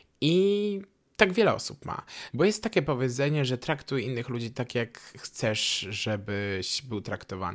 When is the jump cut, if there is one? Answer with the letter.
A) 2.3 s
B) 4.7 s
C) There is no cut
A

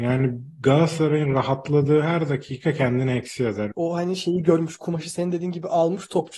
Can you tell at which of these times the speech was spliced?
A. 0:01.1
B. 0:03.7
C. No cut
B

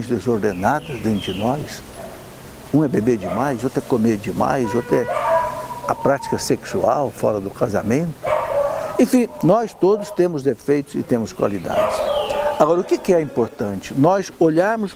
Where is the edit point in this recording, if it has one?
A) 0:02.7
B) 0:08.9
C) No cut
C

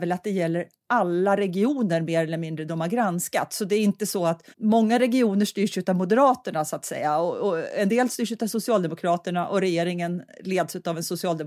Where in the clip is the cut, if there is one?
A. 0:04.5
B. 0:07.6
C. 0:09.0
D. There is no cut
A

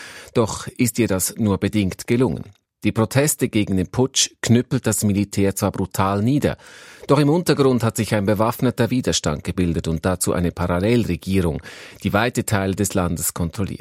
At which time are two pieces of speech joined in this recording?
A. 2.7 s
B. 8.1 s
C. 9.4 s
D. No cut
A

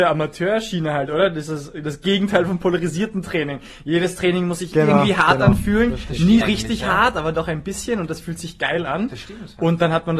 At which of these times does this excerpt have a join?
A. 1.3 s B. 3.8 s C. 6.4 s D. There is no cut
C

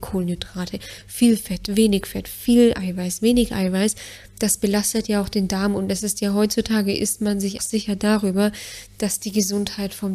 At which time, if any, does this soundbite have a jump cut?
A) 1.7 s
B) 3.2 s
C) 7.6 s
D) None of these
C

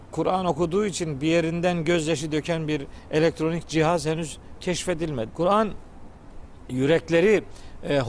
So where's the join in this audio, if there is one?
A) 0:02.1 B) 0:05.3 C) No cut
B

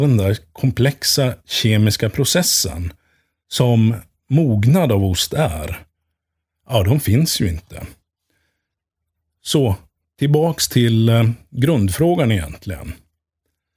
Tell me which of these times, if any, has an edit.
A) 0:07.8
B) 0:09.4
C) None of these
C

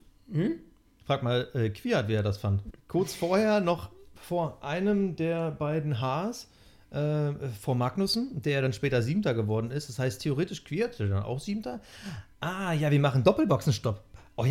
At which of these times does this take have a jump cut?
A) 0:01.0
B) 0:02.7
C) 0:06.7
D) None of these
B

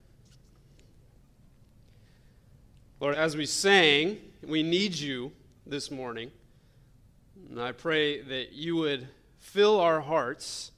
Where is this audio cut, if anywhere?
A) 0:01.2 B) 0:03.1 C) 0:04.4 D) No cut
B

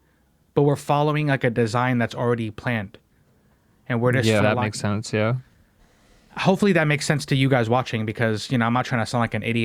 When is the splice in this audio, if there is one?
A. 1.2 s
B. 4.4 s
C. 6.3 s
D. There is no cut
B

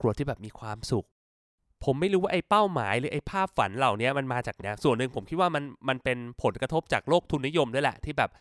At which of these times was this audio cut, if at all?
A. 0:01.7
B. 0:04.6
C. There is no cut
B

